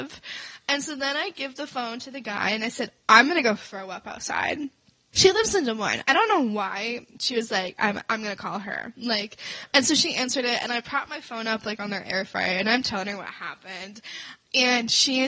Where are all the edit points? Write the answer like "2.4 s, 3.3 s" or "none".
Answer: 5.1 s